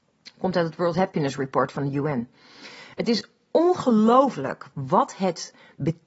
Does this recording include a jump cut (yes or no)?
no